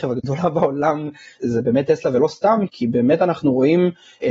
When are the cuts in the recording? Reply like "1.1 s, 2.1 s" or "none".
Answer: 2.7 s